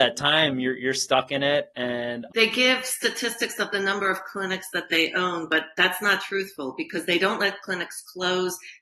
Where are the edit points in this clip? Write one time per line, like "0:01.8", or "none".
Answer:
0:02.3